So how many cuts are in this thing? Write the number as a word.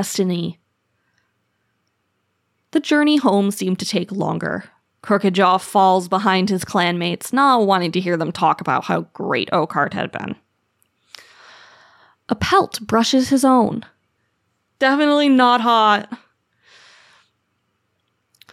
one